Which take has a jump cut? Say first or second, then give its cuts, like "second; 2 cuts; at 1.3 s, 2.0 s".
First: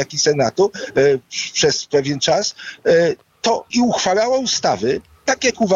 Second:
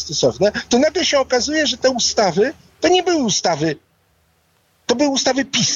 first; 1 cut; at 3.7 s